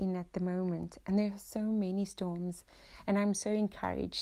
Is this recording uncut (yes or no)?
yes